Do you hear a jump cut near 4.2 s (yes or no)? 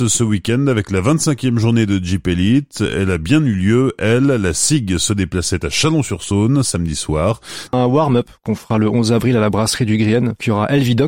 no